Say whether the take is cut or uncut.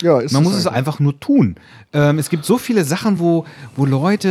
uncut